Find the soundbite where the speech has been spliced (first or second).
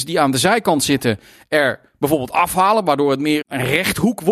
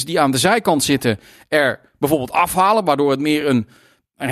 first